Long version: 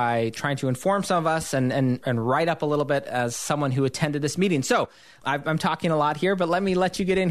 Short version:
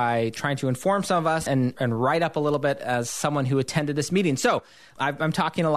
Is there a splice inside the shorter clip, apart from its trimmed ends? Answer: yes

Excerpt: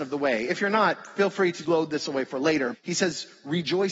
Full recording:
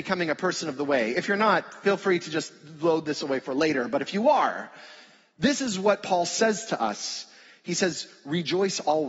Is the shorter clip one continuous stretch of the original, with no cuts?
no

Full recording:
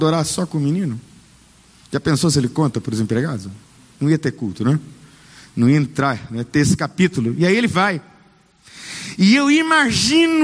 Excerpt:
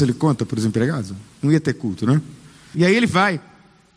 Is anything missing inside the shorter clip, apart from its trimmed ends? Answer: yes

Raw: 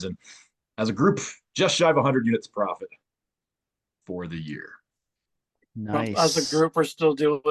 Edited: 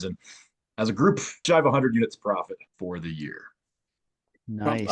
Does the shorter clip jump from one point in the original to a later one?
yes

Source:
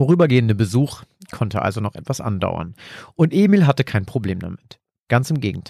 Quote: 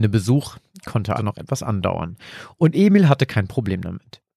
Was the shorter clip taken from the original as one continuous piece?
no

